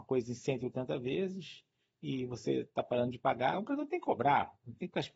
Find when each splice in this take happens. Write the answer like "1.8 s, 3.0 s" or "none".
3.5 s

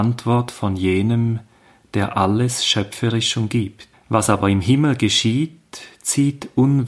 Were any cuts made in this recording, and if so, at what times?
3.9 s

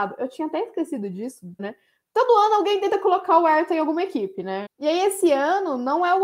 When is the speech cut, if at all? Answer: 1.6 s, 4.7 s

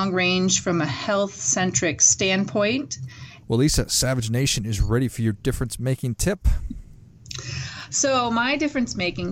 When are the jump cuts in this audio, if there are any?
3.4 s, 6.6 s

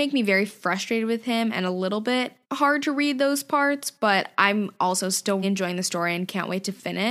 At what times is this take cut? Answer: 2.4 s, 5.4 s

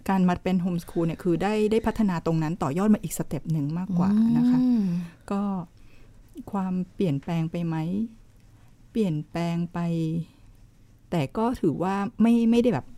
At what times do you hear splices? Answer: none

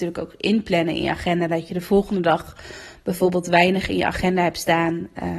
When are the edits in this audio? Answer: none

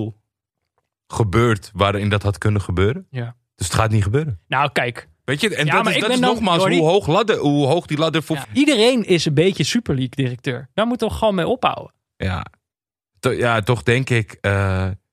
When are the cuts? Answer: 8.4 s

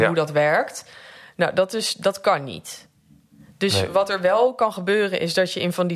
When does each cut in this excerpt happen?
none

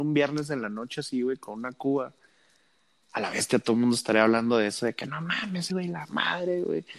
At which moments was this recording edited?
5.7 s

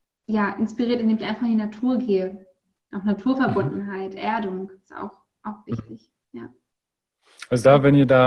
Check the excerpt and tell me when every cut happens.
none

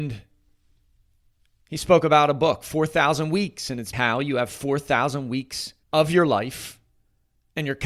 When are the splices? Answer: 3.9 s, 5.8 s

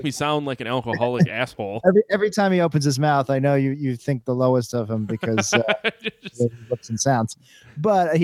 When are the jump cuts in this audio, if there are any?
none

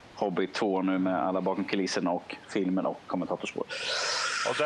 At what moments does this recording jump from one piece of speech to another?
none

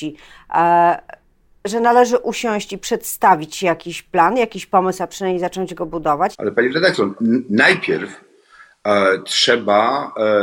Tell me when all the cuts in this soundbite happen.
6.3 s

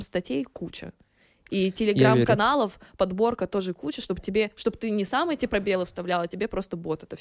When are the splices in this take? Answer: none

